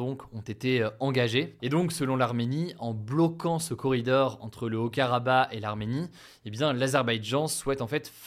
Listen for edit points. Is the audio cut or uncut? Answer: cut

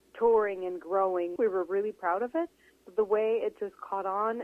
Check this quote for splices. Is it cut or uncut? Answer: cut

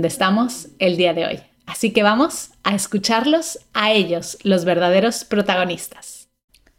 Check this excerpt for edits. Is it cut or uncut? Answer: uncut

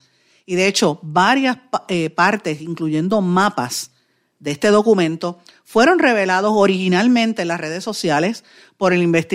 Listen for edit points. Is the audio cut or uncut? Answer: uncut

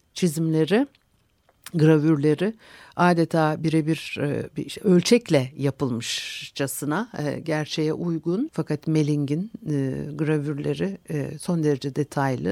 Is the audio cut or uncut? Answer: cut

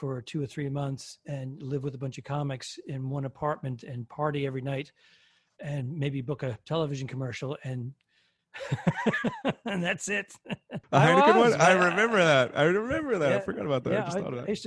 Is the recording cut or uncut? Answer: cut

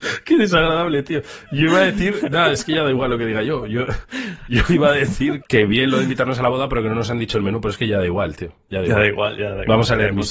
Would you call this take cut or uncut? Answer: cut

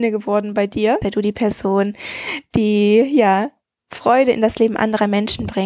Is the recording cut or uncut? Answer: cut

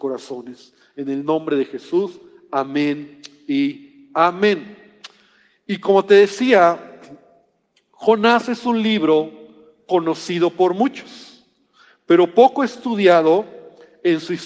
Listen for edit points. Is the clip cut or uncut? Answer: uncut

